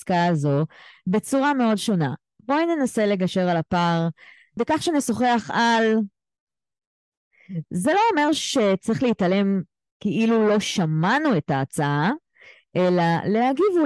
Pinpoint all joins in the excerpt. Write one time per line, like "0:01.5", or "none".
0:04.6
0:07.6